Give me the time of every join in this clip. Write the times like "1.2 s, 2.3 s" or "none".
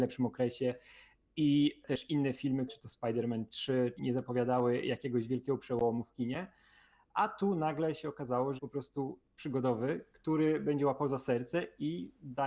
2.7 s, 4.0 s, 8.6 s